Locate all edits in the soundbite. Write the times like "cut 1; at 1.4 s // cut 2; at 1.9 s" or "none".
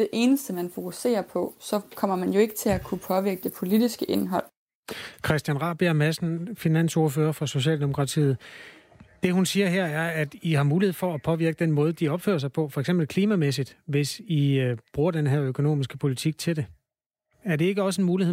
none